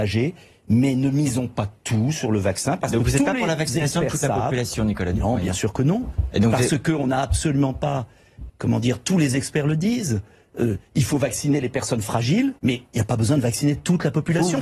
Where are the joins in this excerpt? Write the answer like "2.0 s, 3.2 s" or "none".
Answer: 8.5 s, 12.6 s

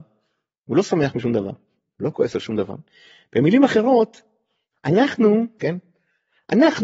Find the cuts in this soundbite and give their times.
5.6 s

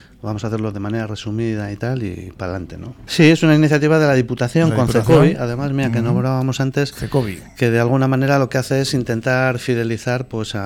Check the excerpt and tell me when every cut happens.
3.1 s

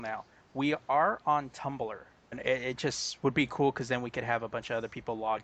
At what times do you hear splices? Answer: 2.3 s

